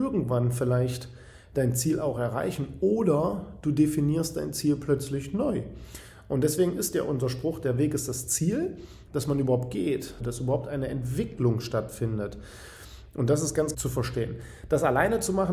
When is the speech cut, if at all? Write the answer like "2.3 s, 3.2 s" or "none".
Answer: 9.1 s, 10.2 s, 13.7 s